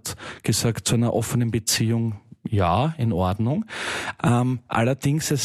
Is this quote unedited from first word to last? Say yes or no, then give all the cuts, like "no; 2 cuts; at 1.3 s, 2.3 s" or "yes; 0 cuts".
no; 1 cut; at 4.2 s